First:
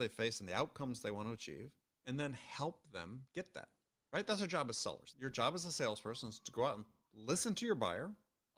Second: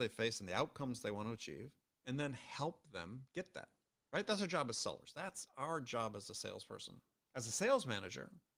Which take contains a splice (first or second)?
first